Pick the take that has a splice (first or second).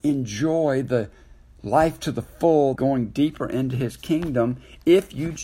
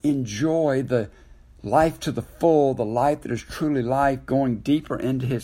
first